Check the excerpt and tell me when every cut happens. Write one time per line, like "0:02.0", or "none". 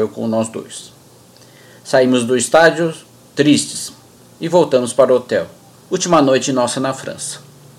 0:05.7